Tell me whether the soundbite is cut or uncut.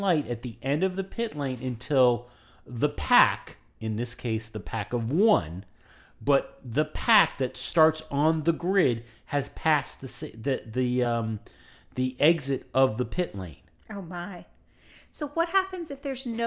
uncut